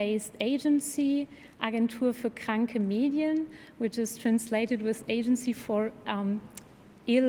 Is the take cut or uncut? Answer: uncut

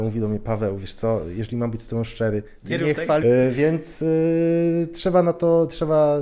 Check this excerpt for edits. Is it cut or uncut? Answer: cut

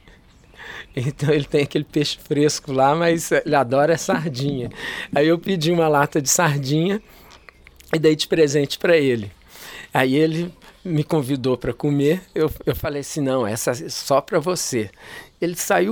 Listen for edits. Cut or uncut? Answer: uncut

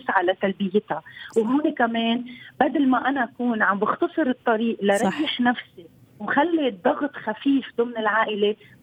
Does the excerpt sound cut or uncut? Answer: uncut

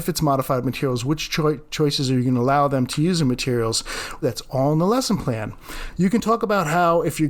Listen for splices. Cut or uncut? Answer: cut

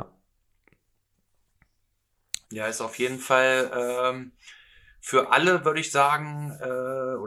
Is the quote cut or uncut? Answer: cut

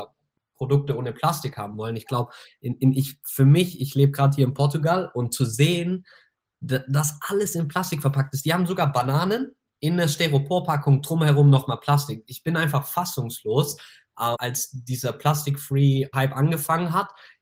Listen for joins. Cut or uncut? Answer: cut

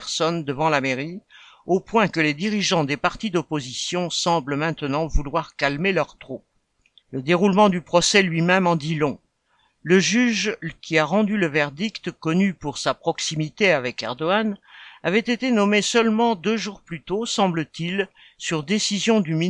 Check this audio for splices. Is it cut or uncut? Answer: cut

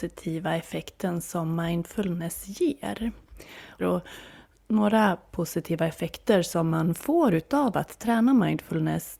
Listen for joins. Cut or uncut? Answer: cut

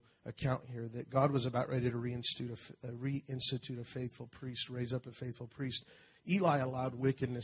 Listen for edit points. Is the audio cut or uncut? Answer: uncut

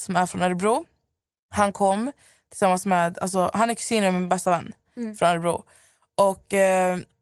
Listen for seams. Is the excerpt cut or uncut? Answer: uncut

